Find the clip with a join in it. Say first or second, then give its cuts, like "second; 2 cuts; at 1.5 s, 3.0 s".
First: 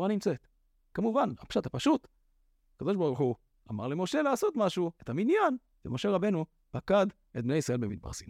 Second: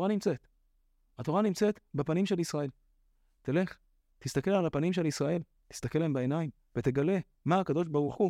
first; 2 cuts; at 0.9 s, 5.0 s